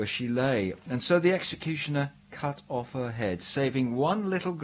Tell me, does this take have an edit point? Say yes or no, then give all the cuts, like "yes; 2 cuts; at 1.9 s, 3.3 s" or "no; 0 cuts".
no; 0 cuts